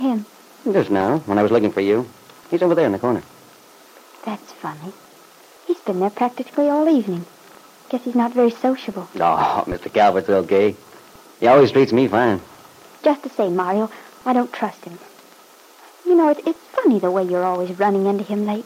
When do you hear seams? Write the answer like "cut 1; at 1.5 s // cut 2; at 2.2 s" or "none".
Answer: none